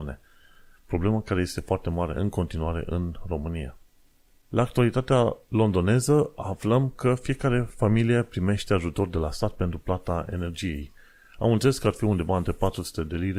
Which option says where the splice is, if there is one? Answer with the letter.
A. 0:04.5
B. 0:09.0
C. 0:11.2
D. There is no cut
A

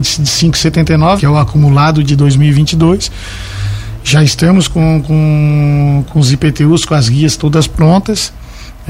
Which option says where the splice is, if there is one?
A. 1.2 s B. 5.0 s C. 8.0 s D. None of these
A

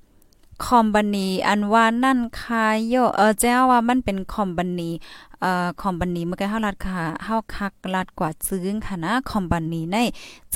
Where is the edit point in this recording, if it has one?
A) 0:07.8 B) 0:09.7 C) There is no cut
B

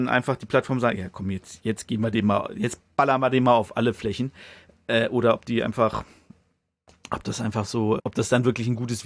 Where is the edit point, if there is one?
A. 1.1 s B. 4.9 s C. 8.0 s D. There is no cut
C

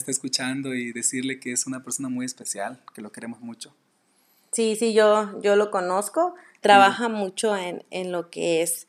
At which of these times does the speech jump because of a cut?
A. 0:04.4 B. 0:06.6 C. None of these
B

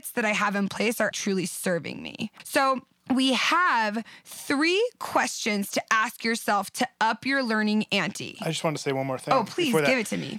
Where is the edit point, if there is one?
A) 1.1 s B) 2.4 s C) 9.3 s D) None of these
A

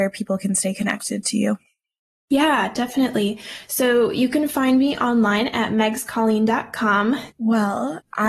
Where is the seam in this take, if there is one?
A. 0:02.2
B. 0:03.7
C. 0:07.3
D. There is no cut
C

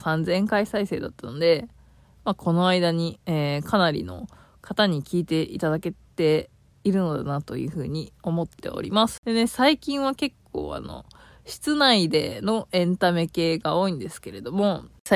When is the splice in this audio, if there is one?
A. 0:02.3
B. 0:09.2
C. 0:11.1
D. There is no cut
B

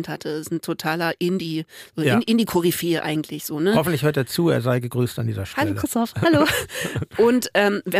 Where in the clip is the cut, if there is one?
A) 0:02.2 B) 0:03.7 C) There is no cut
C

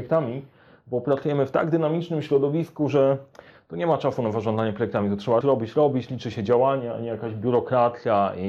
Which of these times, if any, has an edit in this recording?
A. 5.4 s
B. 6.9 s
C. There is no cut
A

